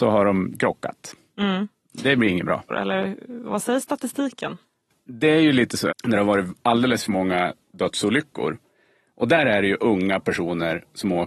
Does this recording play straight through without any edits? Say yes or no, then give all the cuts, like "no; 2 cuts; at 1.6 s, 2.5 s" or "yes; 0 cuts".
no; 2 cuts; at 2.7 s, 5.9 s